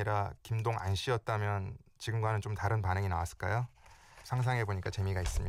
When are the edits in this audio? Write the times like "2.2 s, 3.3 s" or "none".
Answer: none

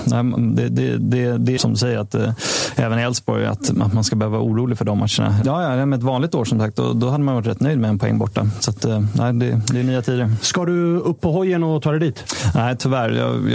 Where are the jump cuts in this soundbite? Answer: 1.6 s, 5.4 s

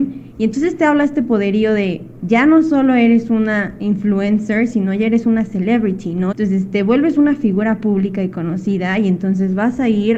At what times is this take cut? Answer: 6.3 s

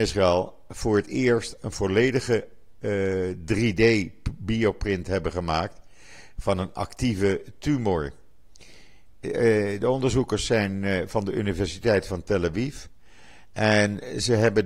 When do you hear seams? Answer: 9.1 s

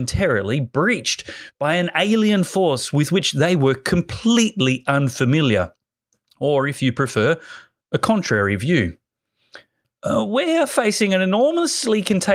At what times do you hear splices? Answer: 9.8 s

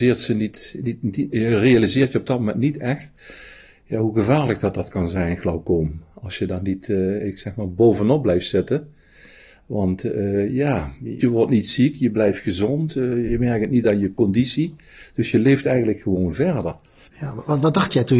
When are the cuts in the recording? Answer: 11.2 s, 17.1 s

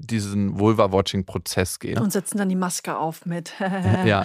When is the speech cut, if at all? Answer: 2.0 s

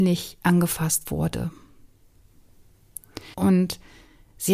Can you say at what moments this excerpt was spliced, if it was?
3.3 s

